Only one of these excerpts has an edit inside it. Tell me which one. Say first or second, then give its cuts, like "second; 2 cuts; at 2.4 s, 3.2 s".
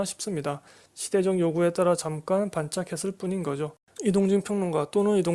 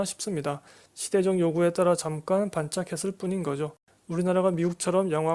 first; 1 cut; at 4.0 s